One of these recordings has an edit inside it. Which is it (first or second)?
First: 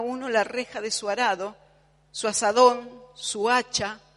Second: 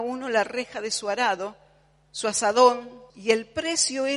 second